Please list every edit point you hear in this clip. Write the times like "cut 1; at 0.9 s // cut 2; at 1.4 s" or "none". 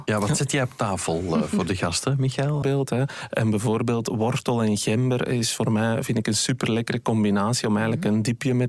cut 1; at 2.6 s